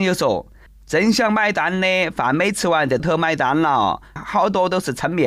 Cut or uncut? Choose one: cut